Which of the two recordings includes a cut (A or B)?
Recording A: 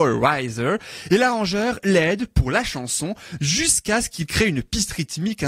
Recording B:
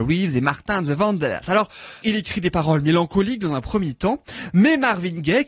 B